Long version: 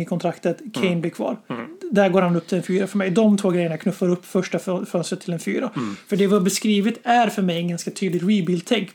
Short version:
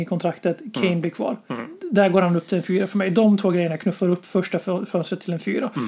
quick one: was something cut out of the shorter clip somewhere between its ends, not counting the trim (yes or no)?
no